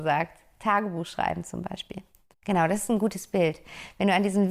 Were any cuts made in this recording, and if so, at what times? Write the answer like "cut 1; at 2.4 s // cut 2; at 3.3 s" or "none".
cut 1; at 2.3 s